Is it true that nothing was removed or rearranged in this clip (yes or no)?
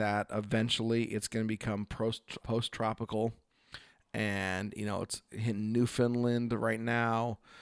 no